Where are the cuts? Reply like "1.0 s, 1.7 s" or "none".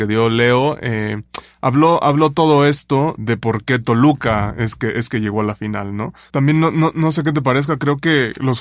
3.2 s, 6.3 s

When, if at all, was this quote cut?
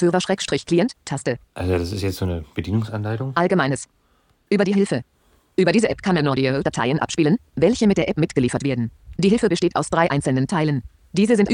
1.0 s, 9.2 s

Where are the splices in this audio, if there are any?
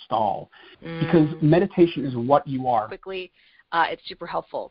2.9 s

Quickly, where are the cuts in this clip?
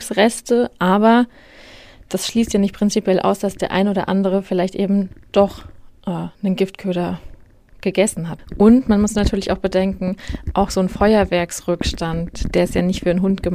none

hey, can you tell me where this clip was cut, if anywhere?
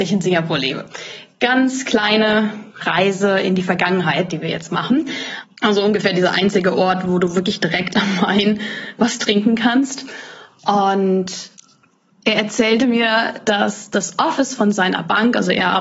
2.7 s, 5.4 s

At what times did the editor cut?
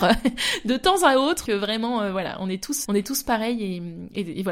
1.5 s, 2.8 s

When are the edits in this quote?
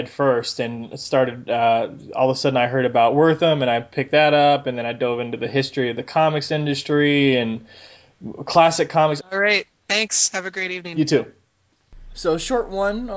9.2 s, 12.1 s

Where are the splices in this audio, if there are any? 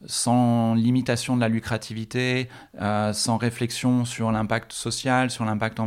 none

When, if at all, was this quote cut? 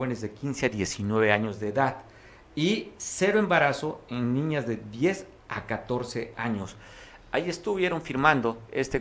none

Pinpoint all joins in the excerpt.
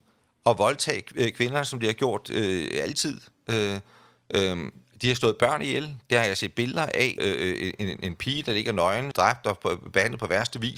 7.2 s, 9.1 s

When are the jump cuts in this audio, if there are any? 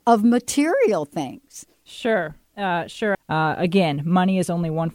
1.9 s, 3.1 s

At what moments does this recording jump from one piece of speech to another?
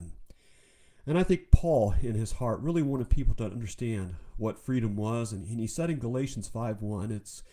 none

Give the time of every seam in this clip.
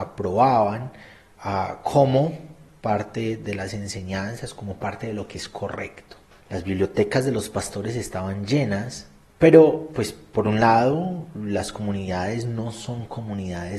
6.4 s, 9.3 s

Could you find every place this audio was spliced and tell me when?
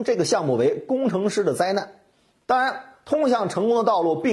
2.4 s

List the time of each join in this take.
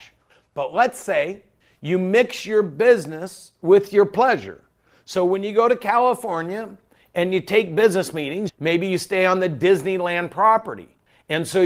8.5 s

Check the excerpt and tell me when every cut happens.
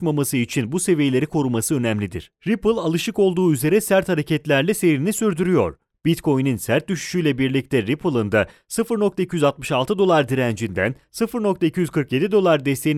2.4 s

